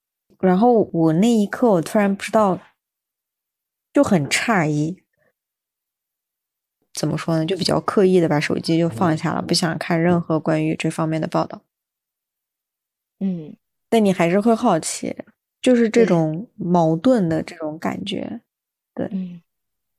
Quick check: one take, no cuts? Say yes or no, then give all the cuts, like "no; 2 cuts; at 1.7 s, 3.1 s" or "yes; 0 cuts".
yes; 0 cuts